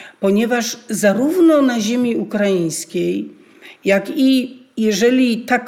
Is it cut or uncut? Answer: uncut